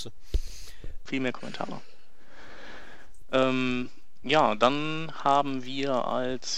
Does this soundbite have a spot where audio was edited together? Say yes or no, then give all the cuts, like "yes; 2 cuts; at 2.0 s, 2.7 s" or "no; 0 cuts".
yes; 1 cut; at 1.1 s